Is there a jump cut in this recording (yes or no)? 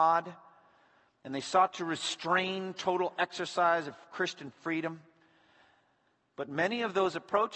no